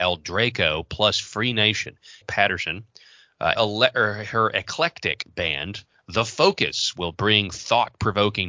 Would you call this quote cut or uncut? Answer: cut